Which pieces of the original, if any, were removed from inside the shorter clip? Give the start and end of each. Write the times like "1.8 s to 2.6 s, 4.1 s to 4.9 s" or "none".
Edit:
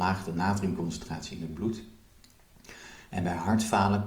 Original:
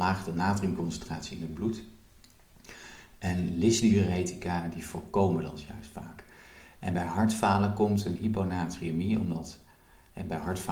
3.1 s to 6.8 s